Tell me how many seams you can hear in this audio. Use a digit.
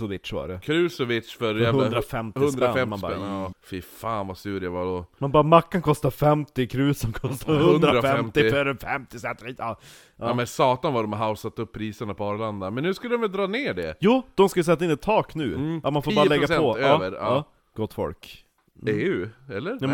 3